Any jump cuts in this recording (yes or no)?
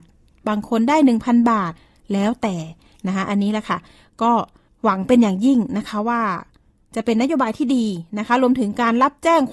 no